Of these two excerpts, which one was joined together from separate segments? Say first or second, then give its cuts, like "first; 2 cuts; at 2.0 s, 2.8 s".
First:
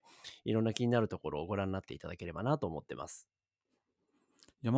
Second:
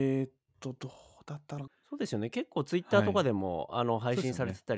second; 1 cut; at 1.7 s